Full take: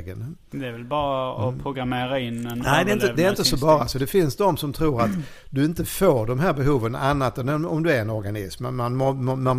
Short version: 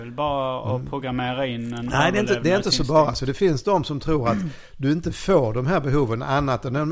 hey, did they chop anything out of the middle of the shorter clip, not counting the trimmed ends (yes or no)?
no